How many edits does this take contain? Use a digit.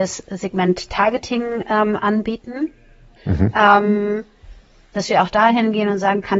1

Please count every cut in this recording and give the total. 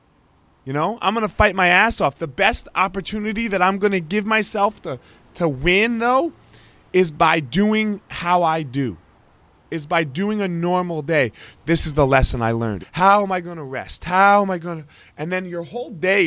2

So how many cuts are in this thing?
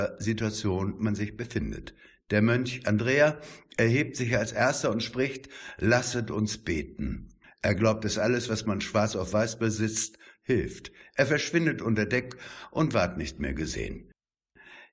1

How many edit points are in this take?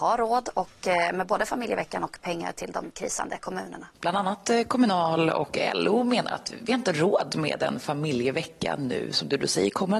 1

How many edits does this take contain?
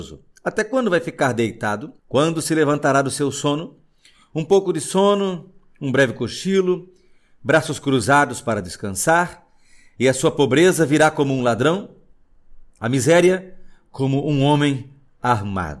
1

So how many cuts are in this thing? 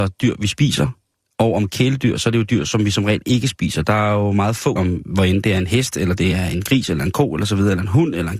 1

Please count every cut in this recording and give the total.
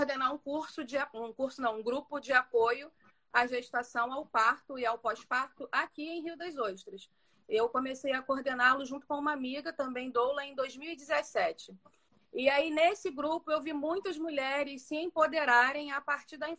0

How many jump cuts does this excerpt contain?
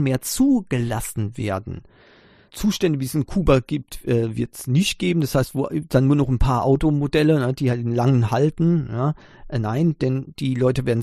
1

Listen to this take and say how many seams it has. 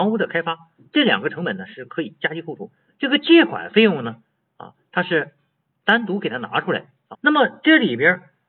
2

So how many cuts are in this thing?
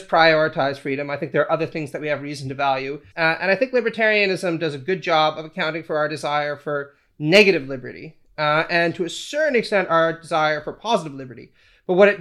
1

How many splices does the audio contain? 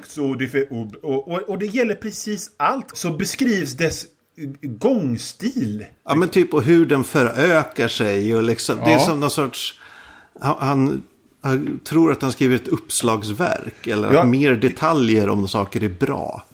1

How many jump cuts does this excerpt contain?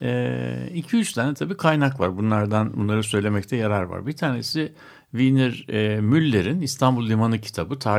0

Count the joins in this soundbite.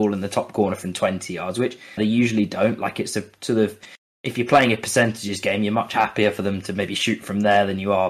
1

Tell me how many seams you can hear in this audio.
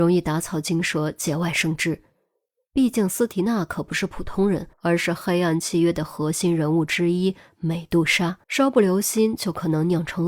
2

